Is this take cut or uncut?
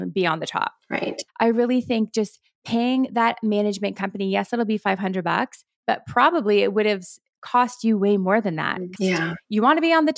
cut